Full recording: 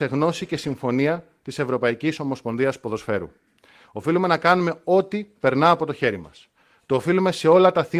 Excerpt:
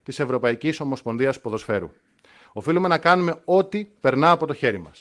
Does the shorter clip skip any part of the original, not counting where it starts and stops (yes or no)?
no